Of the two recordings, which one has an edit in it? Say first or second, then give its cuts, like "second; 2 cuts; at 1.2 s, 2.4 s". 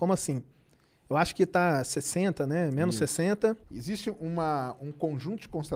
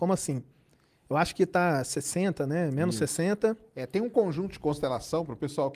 first; 1 cut; at 3.6 s